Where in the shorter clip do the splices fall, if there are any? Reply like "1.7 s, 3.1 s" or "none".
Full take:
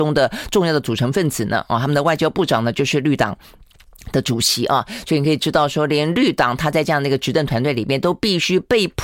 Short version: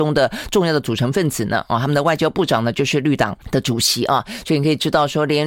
3.4 s